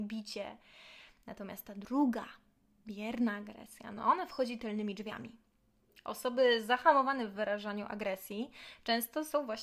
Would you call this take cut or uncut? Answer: uncut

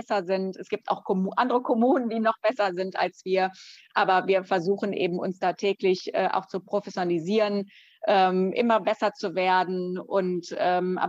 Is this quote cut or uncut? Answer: uncut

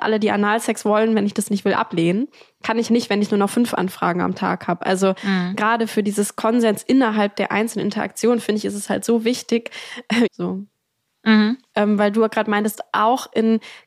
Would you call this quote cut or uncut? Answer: cut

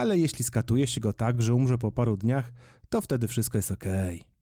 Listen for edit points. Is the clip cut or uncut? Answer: uncut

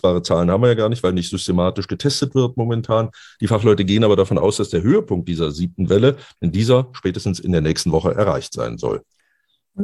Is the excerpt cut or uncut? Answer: uncut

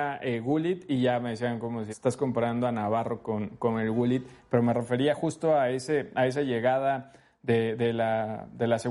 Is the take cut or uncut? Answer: cut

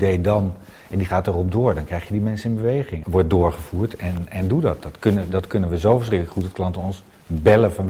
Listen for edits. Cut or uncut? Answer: cut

